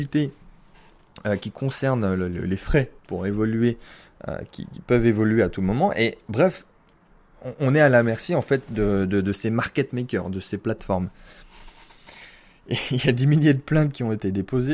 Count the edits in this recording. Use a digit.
0